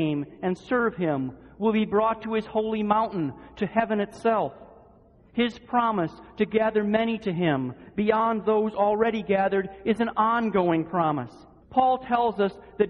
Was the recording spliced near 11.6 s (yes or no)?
yes